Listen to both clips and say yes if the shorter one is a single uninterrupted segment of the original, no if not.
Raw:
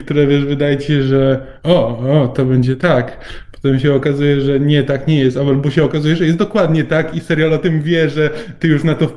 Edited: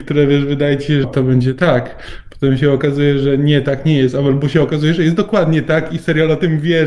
no